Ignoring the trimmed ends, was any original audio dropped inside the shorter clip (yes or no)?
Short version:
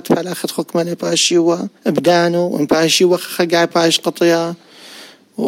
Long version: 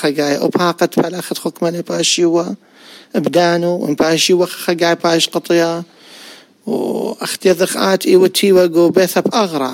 yes